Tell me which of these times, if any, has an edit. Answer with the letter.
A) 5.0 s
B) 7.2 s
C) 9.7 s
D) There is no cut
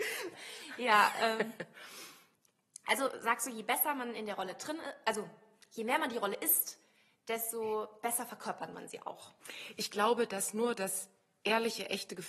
D